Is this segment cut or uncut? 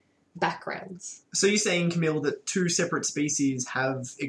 uncut